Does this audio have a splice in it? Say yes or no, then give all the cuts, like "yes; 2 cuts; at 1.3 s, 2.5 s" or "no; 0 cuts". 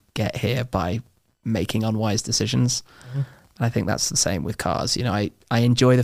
no; 0 cuts